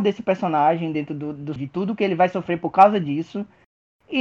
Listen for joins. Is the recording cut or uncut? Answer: cut